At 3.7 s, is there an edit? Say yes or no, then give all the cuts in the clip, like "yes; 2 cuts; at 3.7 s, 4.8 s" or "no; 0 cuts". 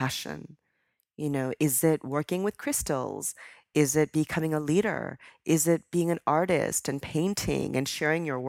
no; 0 cuts